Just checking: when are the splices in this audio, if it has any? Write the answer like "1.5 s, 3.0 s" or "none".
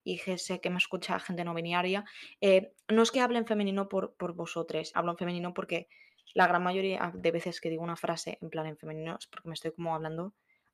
4.9 s